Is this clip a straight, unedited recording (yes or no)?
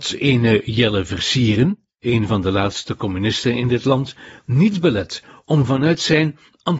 yes